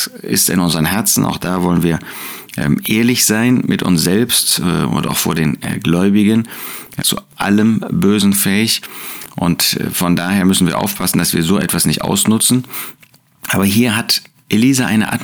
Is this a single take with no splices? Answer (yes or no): no